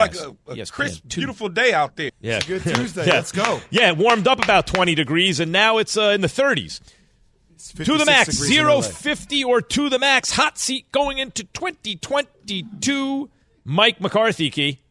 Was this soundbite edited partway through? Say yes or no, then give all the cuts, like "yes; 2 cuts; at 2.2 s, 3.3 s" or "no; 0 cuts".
yes; 1 cut; at 2.1 s